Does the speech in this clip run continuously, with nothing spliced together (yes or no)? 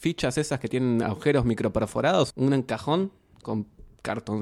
no